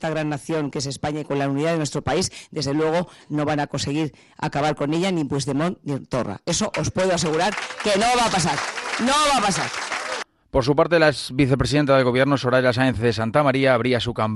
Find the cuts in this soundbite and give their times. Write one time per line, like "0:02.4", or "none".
none